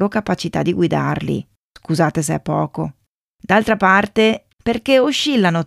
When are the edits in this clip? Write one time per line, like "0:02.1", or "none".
0:04.5